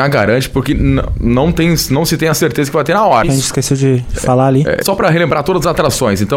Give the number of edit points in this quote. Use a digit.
2